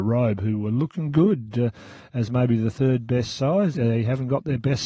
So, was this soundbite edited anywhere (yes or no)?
yes